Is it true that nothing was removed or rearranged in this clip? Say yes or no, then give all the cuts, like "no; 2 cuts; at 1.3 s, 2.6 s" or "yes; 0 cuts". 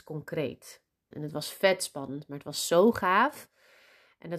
no; 1 cut; at 1.1 s